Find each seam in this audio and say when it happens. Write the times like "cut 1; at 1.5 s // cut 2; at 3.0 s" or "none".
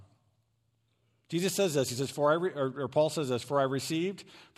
none